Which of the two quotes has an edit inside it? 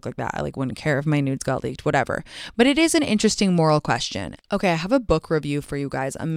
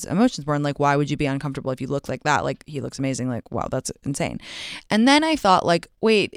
first; 1 cut; at 4.4 s

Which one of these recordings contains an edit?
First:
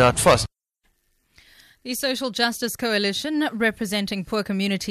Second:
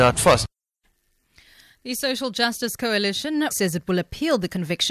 second; 1 cut; at 3.5 s

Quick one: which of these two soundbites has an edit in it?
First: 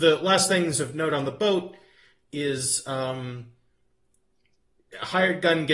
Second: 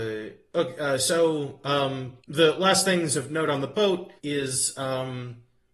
second; 2 cuts; at 2.2 s, 4.2 s

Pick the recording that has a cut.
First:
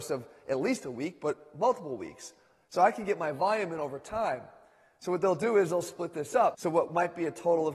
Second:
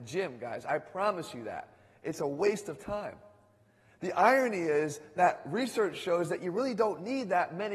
first; 1 cut; at 6.5 s

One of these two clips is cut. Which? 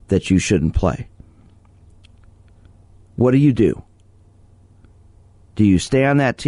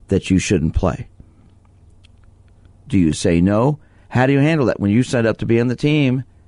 second; 1 cut; at 2.9 s

